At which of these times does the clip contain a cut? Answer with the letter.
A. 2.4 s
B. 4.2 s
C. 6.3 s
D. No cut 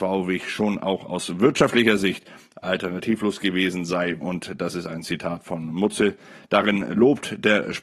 B